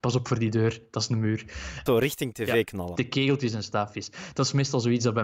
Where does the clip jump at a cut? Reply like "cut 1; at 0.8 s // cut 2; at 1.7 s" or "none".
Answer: cut 1; at 1.9 s // cut 2; at 2.9 s